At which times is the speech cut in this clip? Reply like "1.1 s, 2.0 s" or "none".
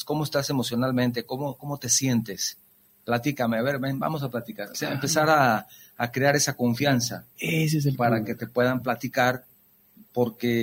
none